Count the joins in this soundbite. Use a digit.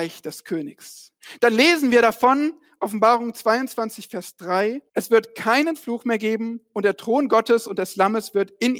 1